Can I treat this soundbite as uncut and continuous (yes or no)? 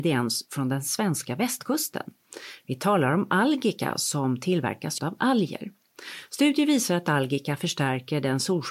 no